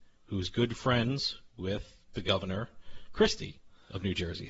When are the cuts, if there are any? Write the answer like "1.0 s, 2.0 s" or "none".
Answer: none